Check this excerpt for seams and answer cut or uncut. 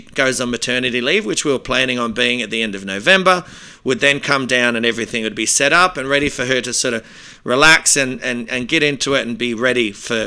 uncut